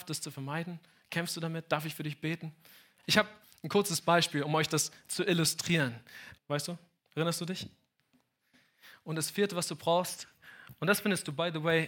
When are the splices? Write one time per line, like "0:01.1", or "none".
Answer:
0:03.0
0:06.4